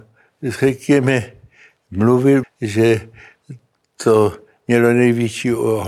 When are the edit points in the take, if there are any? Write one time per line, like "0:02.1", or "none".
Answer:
0:02.4